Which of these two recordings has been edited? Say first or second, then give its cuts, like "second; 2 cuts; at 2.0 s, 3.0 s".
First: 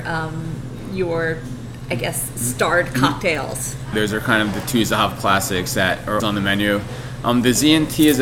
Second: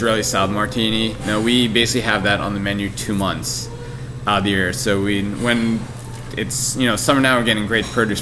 first; 2 cuts; at 3.9 s, 6.2 s